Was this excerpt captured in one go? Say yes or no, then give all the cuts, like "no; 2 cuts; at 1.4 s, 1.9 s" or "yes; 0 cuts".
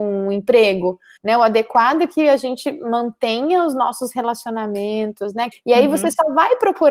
no; 2 cuts; at 1.2 s, 5.5 s